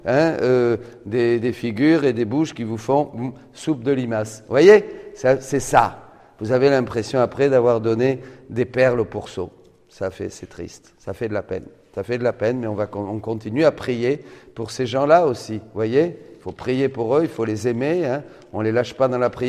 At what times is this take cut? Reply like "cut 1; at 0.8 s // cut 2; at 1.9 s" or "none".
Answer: none